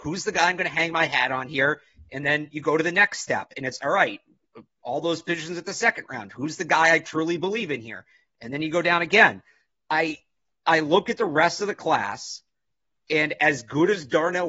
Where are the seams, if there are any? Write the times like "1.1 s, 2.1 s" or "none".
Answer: none